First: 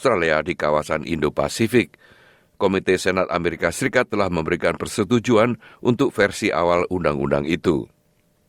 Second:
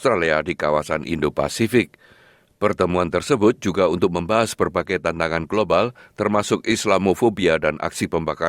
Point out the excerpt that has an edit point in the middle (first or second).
second